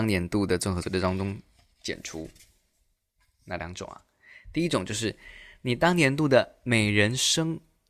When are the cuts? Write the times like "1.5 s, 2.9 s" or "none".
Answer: none